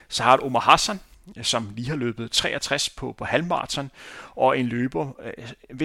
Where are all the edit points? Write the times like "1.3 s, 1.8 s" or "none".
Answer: none